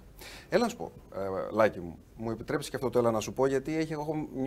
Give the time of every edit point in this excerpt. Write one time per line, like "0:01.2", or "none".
none